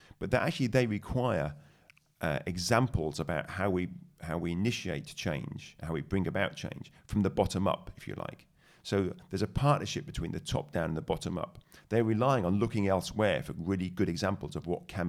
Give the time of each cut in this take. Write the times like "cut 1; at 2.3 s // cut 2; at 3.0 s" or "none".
cut 1; at 11.8 s